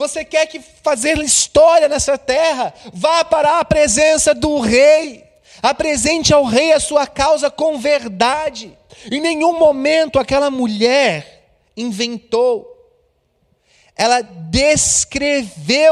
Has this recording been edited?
no; 0 cuts

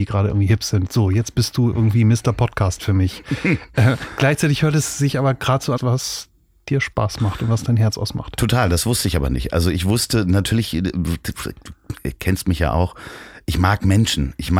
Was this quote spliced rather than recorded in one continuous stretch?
yes; 1 cut; at 5.8 s

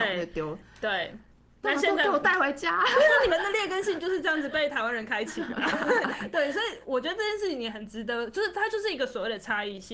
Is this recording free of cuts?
no; 1 cut; at 3.3 s

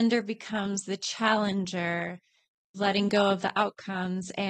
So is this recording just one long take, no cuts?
yes; 0 cuts

